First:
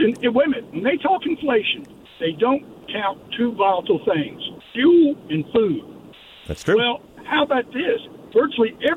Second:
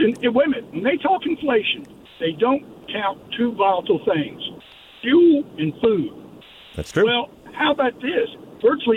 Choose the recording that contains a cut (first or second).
first